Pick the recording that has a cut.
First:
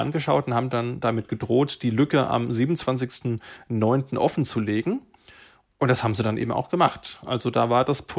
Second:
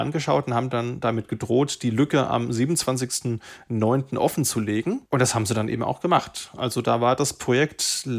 second; 1 cut; at 5.1 s

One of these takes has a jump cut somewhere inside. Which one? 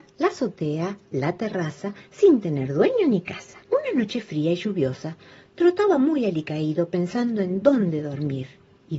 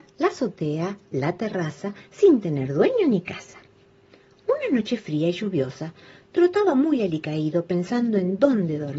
first; 1 cut; at 3.6 s

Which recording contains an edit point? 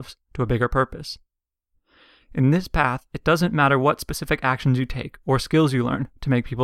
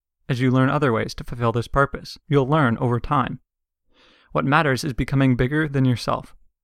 second; 1 cut; at 2.2 s

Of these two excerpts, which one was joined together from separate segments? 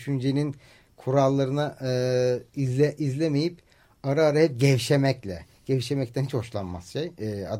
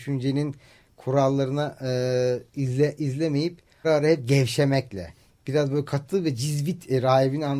second; 2 cuts; at 3.8 s, 5.3 s

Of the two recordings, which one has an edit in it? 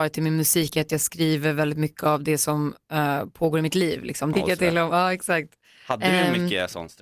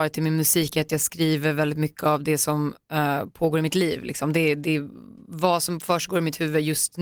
first; 1 cut; at 4.3 s

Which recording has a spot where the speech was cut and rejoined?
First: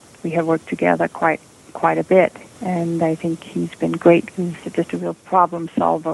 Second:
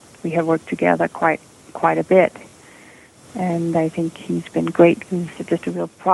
first; 1 cut; at 2.5 s

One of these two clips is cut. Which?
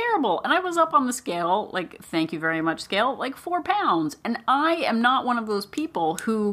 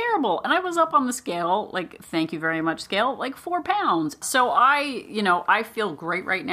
second; 1 cut; at 4.2 s

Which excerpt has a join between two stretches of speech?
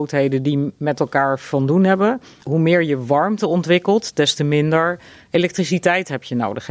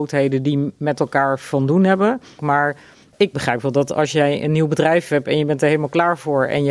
second; 1 cut; at 2.4 s

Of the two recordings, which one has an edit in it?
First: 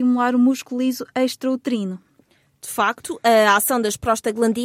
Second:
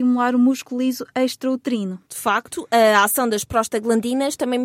second; 1 cut; at 2.1 s

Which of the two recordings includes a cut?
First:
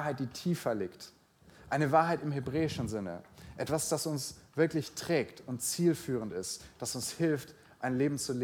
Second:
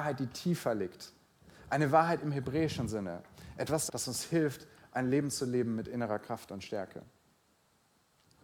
second; 1 cut; at 3.9 s

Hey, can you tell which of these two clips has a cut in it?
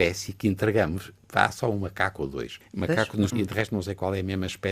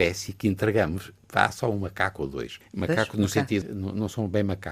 first; 1 cut; at 3.3 s

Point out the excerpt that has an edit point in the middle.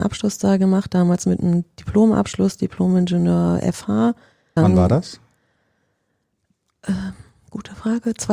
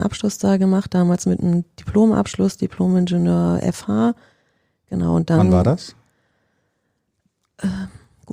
first; 1 cut; at 4.6 s

